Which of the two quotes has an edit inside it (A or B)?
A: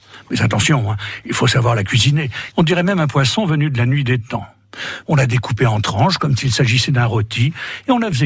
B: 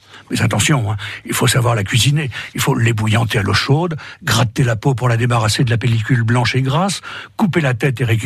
A